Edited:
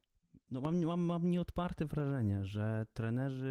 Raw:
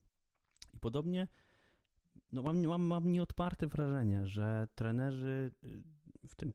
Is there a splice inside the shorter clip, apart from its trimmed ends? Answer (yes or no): no